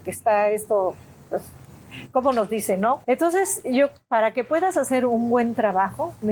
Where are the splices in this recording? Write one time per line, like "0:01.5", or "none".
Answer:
0:03.0